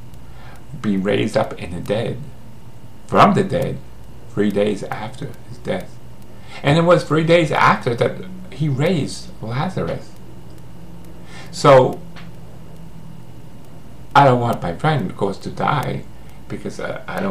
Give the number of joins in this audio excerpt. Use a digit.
0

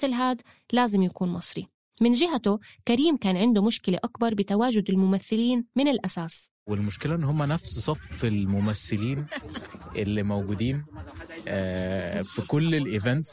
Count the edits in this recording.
1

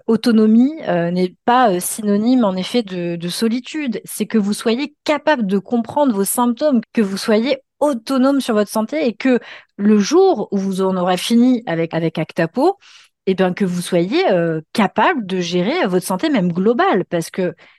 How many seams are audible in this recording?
3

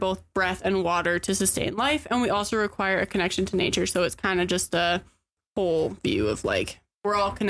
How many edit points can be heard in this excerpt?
1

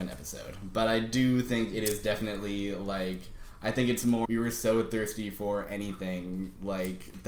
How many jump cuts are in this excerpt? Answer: 1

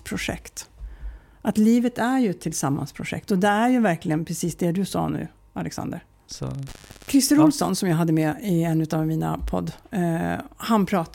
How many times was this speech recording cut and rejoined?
2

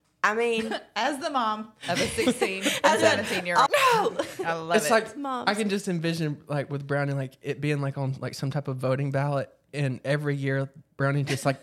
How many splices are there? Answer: 1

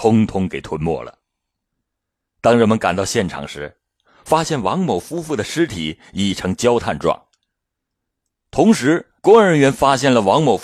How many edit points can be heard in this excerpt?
1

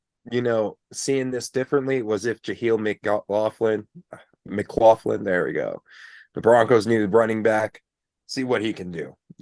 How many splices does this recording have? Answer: 0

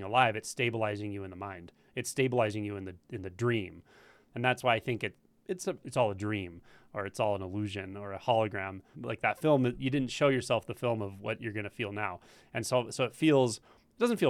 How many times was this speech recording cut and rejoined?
2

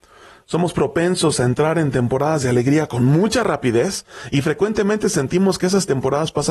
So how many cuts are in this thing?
0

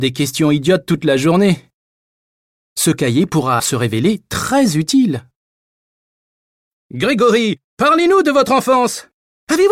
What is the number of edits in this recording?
1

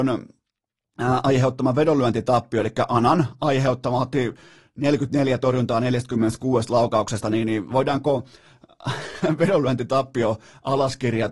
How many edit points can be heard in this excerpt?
0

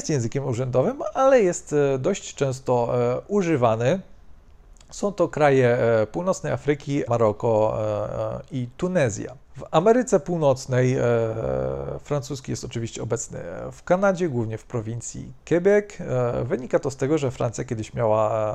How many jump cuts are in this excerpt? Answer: 2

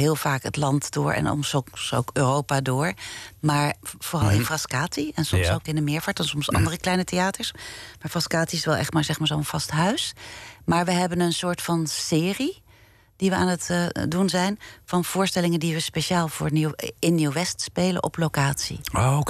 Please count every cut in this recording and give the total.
1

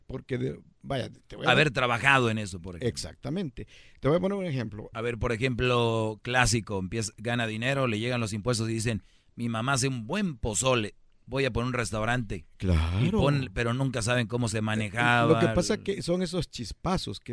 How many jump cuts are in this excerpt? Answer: 1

